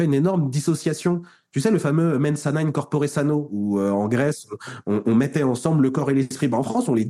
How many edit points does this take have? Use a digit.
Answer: 0